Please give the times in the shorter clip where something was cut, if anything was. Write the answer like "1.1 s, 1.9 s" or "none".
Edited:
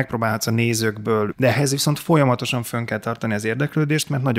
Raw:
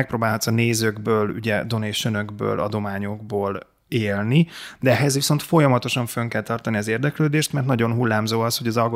1.3 s